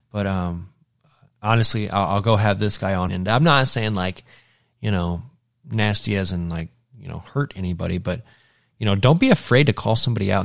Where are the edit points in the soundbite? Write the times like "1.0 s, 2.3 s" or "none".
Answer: 3.1 s